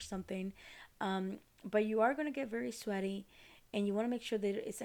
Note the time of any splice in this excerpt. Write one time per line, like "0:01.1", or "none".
none